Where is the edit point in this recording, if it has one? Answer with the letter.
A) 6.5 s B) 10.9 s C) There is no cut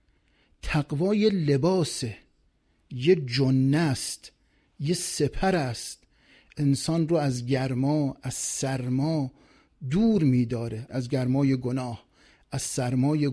B